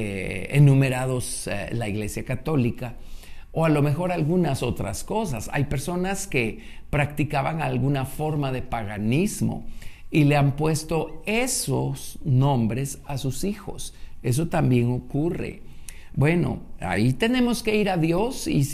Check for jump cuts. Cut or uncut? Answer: uncut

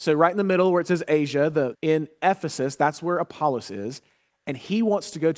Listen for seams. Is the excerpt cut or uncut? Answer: cut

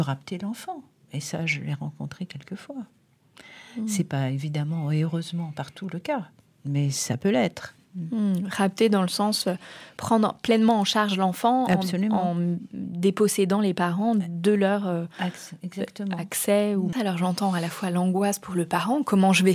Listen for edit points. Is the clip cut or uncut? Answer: cut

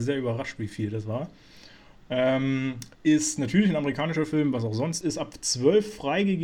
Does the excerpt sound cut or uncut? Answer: cut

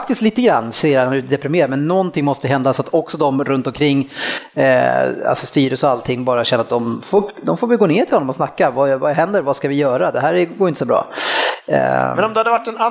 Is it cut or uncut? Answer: uncut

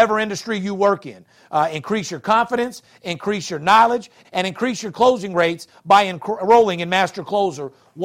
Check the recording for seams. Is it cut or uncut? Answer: cut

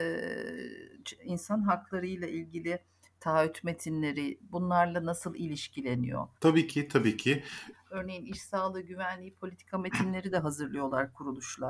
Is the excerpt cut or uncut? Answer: cut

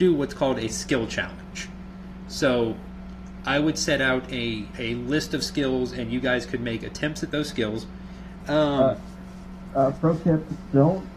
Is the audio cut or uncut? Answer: cut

